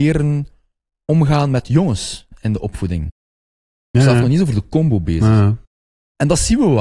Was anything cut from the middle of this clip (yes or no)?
yes